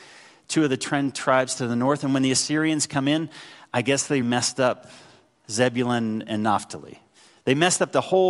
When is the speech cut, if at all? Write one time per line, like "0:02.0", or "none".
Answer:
0:04.2